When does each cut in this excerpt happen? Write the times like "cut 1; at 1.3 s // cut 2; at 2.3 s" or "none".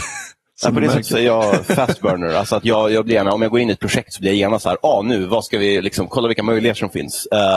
none